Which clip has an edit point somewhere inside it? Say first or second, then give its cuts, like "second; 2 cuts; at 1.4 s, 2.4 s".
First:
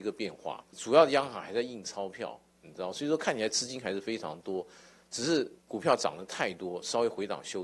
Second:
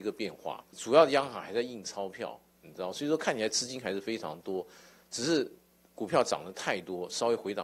first; 1 cut; at 5.6 s